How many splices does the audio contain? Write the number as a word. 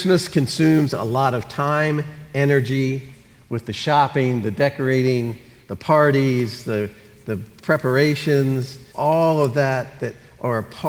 one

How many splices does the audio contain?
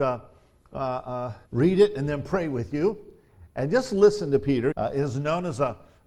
two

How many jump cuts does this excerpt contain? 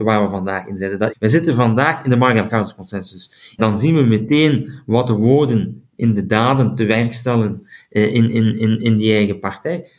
two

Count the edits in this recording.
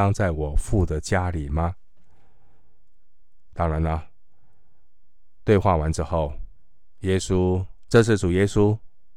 two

